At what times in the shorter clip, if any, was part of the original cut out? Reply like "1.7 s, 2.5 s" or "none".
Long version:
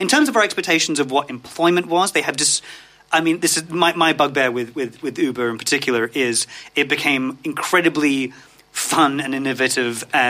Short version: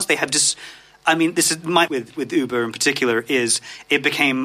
1.9 s